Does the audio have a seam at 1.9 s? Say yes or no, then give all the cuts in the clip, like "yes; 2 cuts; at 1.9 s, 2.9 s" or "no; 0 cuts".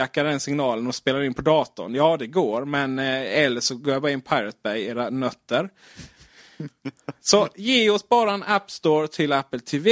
no; 0 cuts